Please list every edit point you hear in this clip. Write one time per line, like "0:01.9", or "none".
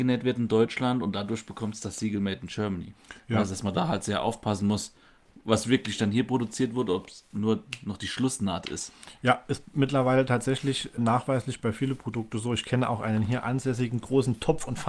none